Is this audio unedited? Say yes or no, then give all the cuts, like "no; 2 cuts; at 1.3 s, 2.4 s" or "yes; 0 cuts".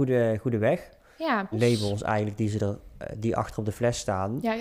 no; 1 cut; at 1.5 s